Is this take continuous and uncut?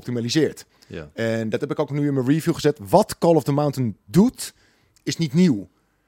yes; 0 cuts

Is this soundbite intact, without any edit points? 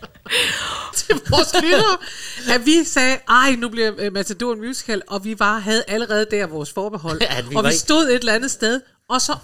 no; 1 cut; at 0.9 s

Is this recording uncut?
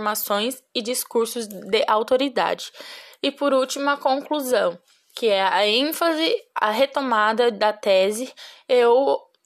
yes; 0 cuts

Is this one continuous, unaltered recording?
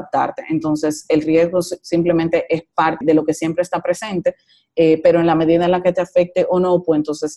no; 1 cut; at 3.0 s

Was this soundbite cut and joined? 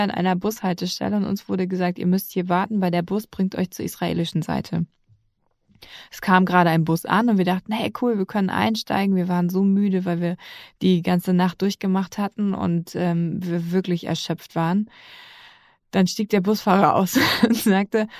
no; 0 cuts

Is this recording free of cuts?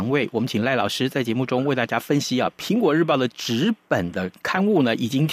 yes; 0 cuts

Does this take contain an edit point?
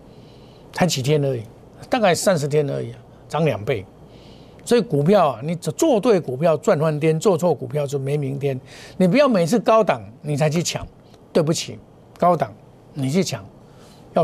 no; 0 cuts

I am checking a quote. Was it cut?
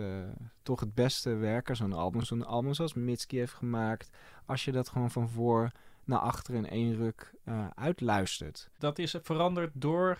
no; 0 cuts

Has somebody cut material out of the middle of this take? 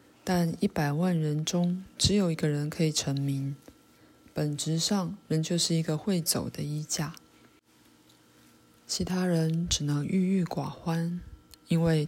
no; 0 cuts

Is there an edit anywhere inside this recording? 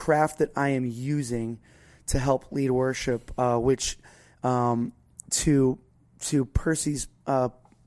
no; 0 cuts

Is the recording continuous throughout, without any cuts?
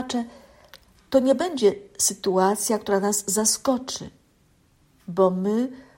yes; 0 cuts

